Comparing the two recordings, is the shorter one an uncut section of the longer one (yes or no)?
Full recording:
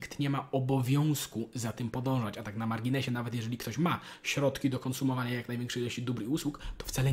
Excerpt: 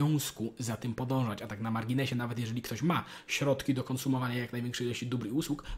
yes